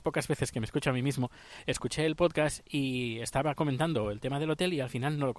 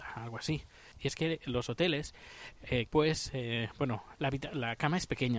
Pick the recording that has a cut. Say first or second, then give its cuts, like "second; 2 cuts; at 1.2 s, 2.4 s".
second; 3 cuts; at 0.9 s, 2.9 s, 4.1 s